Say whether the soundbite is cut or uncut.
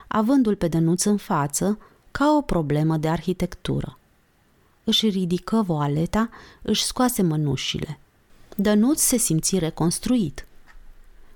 uncut